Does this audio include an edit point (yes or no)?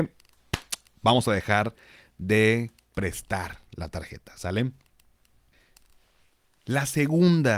no